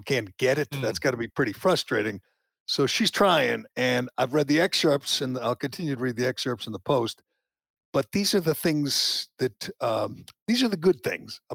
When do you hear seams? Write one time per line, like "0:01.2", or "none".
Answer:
none